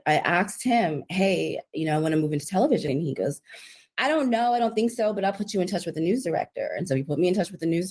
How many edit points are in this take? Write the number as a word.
one